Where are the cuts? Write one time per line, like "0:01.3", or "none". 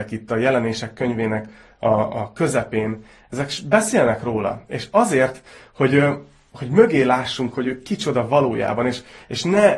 none